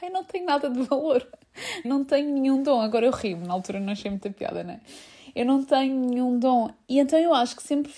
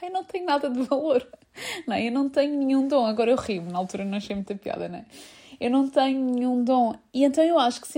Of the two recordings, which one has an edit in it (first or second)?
first